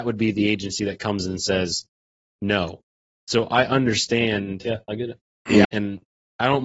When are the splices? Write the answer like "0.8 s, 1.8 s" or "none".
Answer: 5.6 s